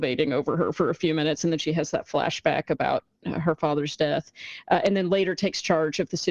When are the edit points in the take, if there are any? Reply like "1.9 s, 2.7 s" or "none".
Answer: none